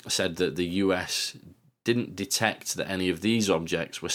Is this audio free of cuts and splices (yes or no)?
yes